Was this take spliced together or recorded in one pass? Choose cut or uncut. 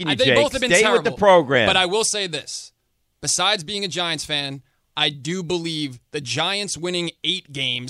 uncut